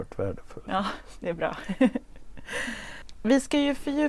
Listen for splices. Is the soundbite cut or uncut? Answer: uncut